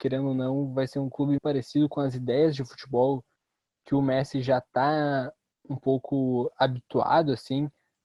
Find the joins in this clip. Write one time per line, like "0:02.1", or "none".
0:01.4